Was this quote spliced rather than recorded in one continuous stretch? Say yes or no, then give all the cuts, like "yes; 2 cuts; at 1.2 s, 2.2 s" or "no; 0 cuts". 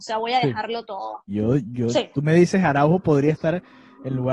yes; 1 cut; at 1.3 s